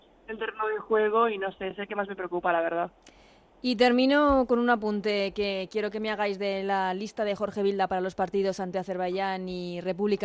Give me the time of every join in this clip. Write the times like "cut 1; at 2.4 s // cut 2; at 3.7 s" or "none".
none